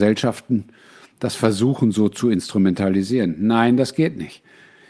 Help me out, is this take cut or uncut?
uncut